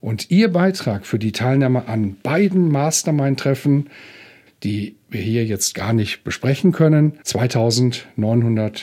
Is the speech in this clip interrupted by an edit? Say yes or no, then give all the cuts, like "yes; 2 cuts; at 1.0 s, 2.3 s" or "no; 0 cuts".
yes; 2 cuts; at 4.5 s, 7.2 s